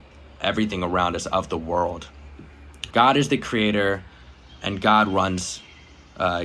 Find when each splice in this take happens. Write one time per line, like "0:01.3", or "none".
0:02.9